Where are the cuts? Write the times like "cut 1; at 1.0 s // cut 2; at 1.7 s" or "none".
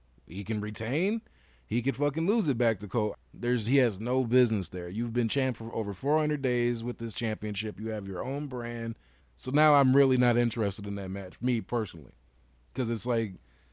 cut 1; at 3.1 s // cut 2; at 9.2 s